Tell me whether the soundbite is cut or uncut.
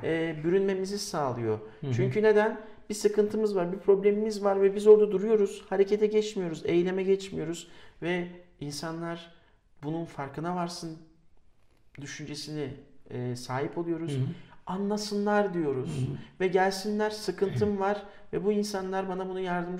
uncut